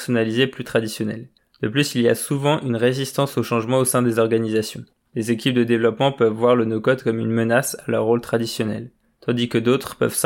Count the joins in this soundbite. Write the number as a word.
zero